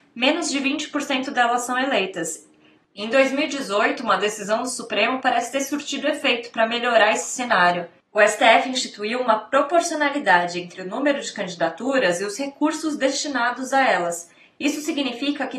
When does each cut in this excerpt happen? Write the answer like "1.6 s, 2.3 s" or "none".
2.8 s